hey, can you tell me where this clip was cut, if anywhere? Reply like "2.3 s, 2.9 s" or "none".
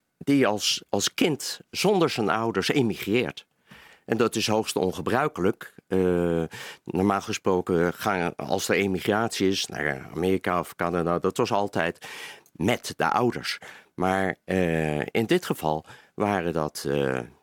none